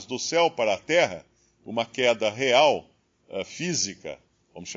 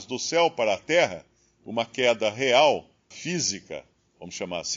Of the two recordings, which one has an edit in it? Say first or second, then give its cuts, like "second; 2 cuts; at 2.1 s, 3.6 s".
second; 1 cut; at 3.1 s